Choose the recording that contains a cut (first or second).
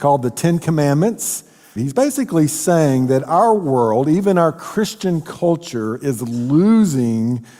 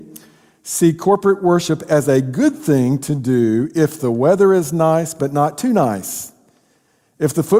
first